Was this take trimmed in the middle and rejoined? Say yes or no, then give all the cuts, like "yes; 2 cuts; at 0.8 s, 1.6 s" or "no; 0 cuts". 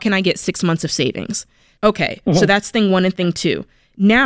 yes; 1 cut; at 1.8 s